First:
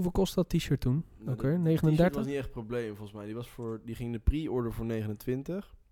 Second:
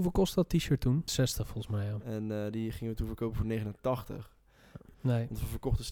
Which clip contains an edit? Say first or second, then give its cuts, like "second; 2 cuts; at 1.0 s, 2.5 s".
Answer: second; 2 cuts; at 1.1 s, 4.9 s